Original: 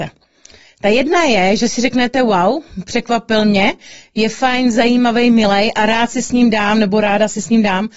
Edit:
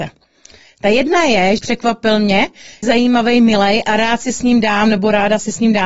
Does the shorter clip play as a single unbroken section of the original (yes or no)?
no